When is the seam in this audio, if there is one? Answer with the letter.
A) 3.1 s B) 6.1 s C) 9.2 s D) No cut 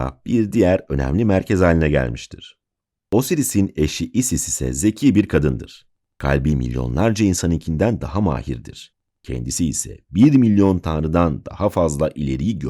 A